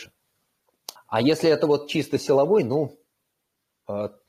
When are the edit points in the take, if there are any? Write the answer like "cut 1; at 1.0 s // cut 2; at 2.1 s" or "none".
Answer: cut 1; at 1.0 s